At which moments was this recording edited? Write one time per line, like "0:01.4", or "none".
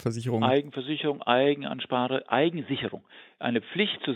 none